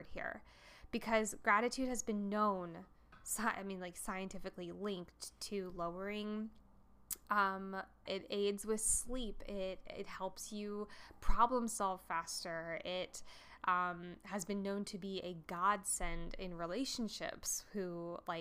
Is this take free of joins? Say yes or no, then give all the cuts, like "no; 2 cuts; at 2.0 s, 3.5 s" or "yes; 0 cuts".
no; 1 cut; at 8.1 s